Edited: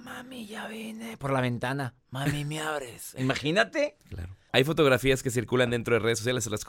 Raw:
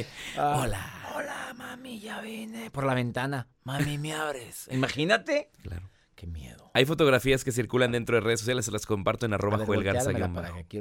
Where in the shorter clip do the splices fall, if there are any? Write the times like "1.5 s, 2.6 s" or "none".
4.5 s